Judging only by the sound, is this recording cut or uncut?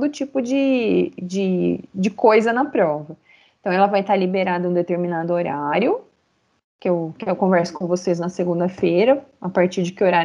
uncut